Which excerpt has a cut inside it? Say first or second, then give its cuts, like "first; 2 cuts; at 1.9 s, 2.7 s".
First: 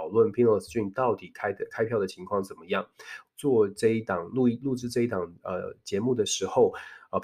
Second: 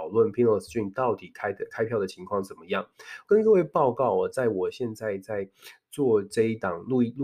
first; 1 cut; at 3.3 s